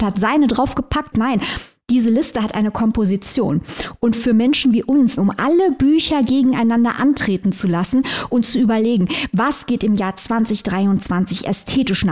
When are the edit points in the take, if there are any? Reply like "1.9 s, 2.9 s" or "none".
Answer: 1.1 s, 5.2 s